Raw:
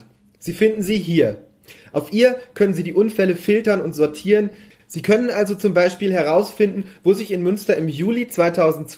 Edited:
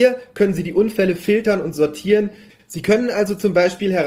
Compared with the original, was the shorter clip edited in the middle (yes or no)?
no